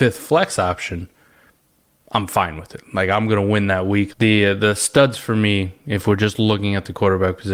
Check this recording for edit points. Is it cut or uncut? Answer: cut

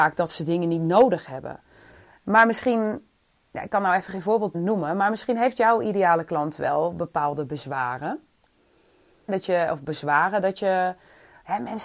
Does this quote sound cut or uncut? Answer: cut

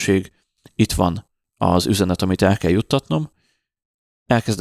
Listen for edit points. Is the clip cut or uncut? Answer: uncut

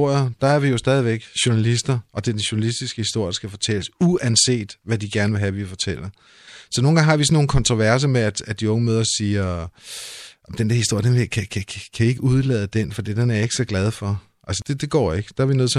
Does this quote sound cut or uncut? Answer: uncut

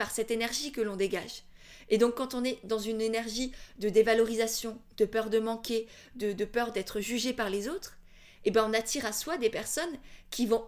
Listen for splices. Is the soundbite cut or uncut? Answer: uncut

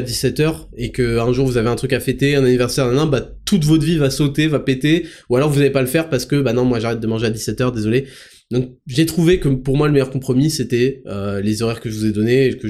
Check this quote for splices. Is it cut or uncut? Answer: uncut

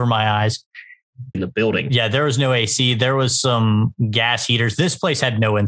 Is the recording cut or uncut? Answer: cut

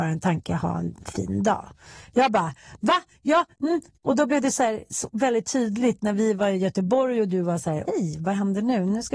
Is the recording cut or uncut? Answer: cut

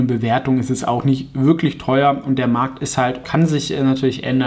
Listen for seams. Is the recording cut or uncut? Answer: cut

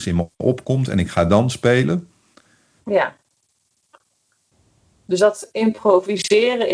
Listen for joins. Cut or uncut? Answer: cut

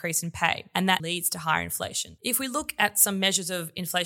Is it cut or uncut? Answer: cut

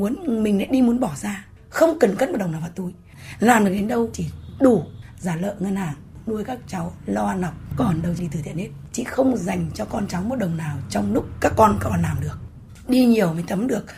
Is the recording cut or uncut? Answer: uncut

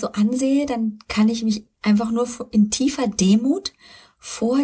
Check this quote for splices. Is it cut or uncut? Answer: uncut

